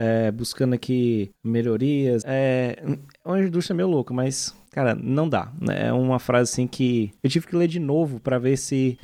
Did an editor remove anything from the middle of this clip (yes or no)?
yes